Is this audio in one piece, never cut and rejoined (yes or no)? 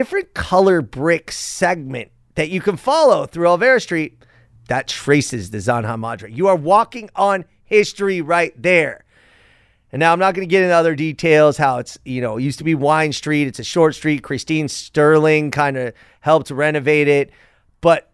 no